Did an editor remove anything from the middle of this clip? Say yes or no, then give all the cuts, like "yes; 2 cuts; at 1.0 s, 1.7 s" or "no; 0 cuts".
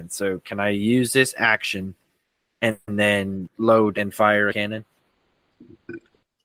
yes; 1 cut; at 2.8 s